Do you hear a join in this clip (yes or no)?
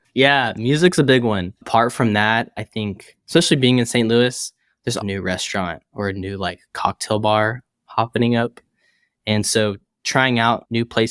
yes